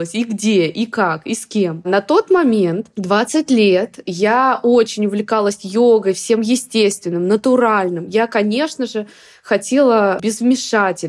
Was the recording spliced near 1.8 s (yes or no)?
no